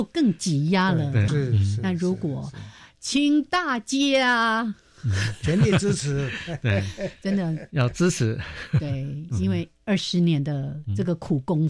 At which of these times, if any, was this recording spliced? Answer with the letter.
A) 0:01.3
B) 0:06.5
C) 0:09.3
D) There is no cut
A